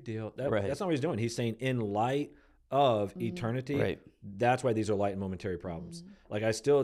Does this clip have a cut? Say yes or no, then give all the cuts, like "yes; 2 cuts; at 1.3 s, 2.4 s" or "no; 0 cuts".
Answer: no; 0 cuts